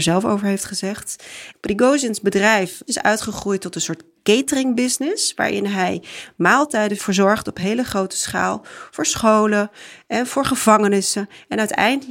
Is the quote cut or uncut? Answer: cut